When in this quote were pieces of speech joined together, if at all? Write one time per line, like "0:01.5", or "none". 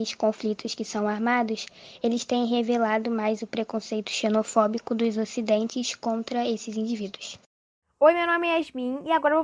none